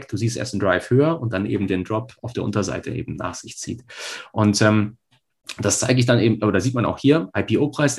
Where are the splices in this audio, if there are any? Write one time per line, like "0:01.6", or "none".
none